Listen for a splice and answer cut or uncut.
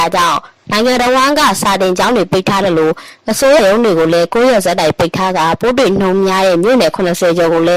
cut